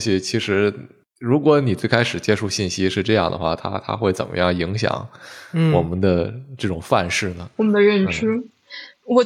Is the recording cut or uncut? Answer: uncut